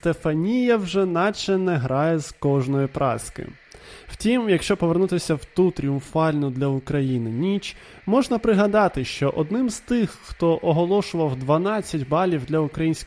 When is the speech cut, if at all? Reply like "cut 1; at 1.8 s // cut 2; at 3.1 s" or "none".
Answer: none